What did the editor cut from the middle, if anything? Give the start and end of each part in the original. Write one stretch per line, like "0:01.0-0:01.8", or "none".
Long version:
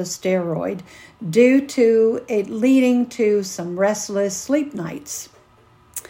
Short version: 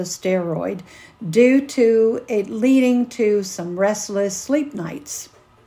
none